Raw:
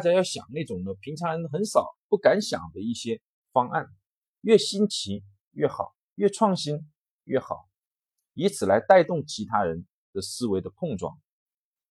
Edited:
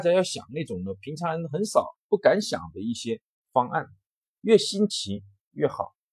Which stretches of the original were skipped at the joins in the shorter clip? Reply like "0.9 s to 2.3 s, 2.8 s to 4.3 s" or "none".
none